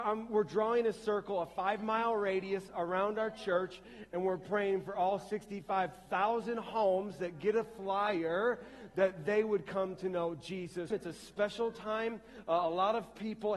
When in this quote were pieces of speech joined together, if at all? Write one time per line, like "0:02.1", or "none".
0:10.9